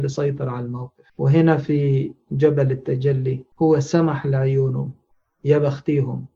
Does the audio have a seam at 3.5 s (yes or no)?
yes